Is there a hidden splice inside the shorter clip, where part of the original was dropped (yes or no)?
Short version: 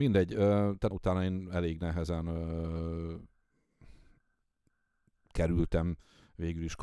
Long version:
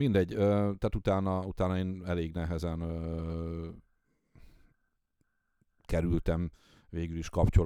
yes